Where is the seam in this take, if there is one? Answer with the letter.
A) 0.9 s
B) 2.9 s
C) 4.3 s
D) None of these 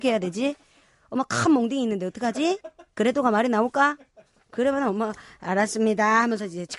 D